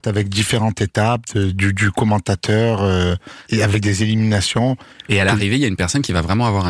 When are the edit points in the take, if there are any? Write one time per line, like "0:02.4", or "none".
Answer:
0:03.4
0:05.0

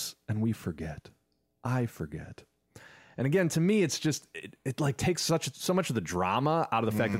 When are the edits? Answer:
none

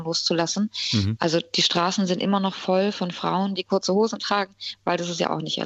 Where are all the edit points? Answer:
0:01.2
0:03.6

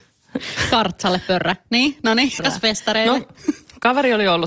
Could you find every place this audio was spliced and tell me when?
0:02.4

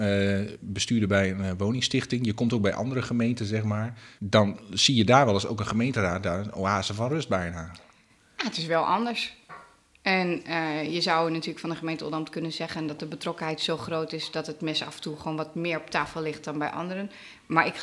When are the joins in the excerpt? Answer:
none

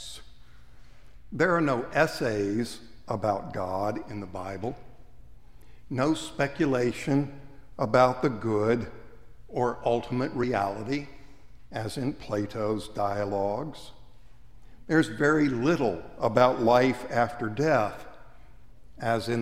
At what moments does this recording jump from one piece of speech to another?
none

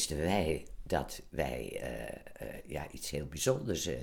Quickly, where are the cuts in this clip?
none

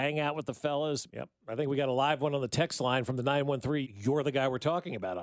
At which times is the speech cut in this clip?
0:01.1
0:03.8

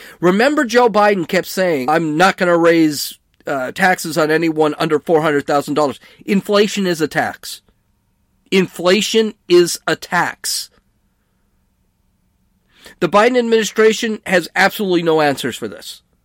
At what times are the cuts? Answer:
0:01.9

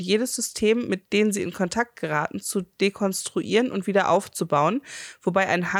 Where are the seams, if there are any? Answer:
0:01.1

